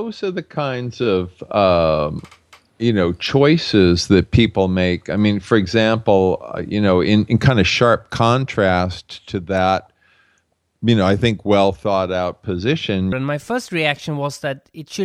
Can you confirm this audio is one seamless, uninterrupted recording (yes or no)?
no